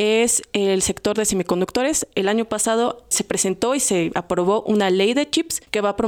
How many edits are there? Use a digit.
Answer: 1